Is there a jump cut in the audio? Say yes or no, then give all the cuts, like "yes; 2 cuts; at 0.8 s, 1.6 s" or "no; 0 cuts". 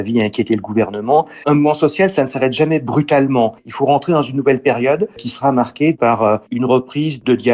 yes; 1 cut; at 1.4 s